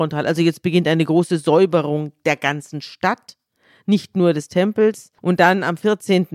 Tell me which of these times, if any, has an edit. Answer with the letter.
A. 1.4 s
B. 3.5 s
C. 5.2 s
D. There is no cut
C